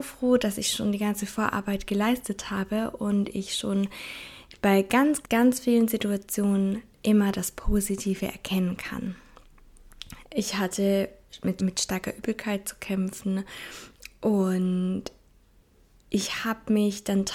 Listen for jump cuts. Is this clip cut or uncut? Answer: cut